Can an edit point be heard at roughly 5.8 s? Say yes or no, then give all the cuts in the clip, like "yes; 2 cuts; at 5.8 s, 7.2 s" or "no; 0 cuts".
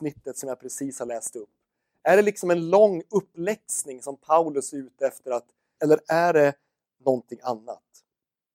yes; 1 cut; at 5.8 s